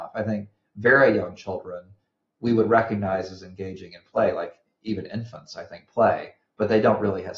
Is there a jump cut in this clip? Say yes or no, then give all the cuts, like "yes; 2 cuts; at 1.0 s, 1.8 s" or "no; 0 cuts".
no; 0 cuts